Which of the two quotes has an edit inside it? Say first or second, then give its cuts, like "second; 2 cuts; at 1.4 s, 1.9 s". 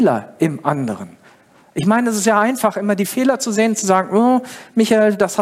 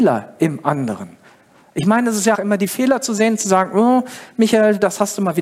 second; 1 cut; at 2.3 s